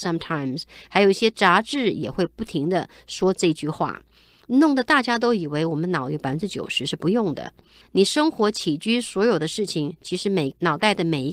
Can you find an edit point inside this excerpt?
yes; 1 cut; at 7.8 s

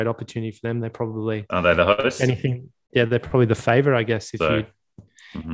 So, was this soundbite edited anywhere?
no; 0 cuts

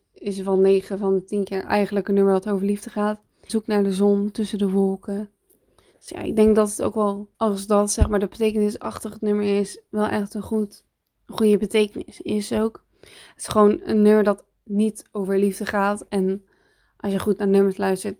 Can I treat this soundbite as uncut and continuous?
no; 2 cuts; at 3.5 s, 7.3 s

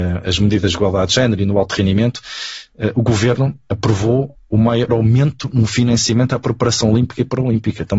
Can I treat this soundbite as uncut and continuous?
no; 1 cut; at 4.9 s

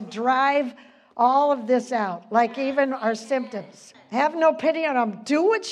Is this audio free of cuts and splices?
no; 1 cut; at 3.9 s

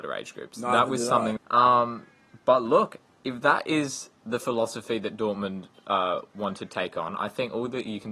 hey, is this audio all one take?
no; 1 cut; at 1.4 s

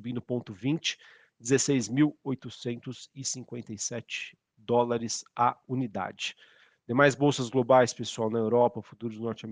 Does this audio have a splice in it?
no; 0 cuts

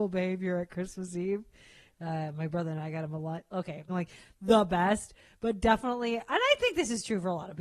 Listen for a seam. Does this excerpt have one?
yes; 1 cut; at 3.9 s

